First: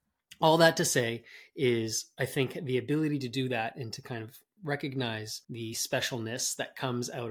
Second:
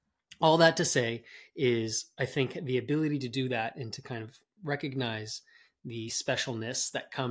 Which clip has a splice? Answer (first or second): first